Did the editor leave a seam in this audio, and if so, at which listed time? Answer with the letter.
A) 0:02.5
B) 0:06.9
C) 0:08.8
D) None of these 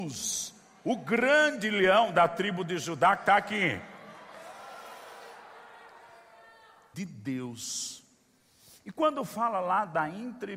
B